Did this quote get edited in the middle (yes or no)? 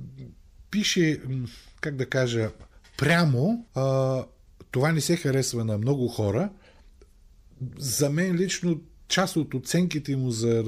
yes